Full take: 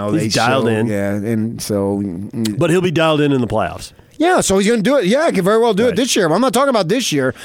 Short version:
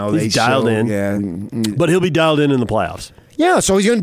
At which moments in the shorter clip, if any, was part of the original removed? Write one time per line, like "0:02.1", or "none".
0:01.2